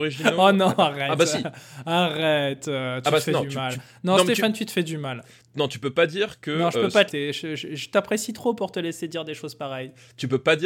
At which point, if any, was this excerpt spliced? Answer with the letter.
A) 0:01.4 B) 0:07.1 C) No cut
B